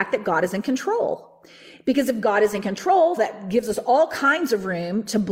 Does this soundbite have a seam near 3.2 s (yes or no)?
yes